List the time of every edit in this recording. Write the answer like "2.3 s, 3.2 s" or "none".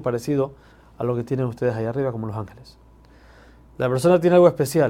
3.6 s